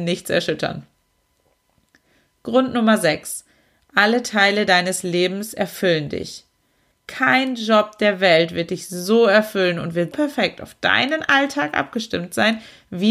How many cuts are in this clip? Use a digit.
2